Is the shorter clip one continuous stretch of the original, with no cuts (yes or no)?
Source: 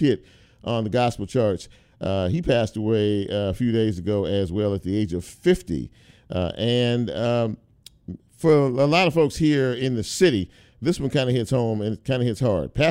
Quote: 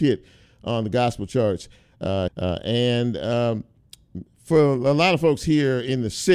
no